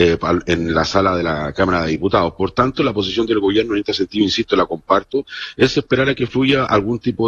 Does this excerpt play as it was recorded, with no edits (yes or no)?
yes